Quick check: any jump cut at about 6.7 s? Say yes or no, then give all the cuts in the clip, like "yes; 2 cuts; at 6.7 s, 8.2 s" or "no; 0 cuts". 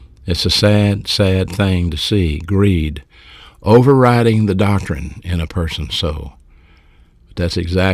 no; 0 cuts